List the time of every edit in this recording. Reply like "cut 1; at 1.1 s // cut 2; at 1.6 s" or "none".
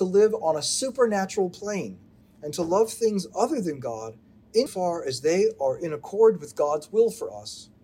cut 1; at 2.2 s // cut 2; at 4.7 s